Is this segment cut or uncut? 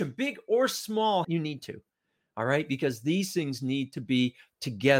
cut